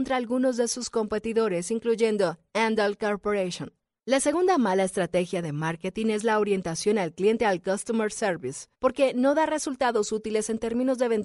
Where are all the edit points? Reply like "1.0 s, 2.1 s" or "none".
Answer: 4.0 s, 8.7 s